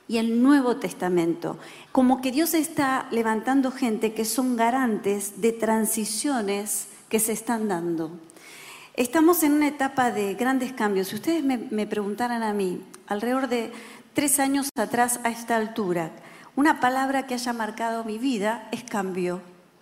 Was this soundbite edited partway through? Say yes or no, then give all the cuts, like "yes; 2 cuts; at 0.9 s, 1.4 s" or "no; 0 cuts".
yes; 1 cut; at 1.9 s